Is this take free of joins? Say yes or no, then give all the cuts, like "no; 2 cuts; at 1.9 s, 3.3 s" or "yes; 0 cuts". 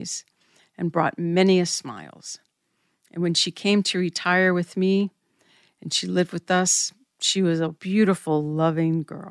yes; 0 cuts